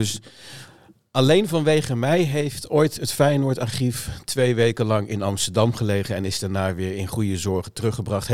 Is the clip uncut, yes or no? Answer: yes